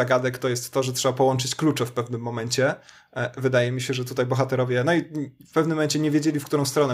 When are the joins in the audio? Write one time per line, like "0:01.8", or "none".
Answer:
none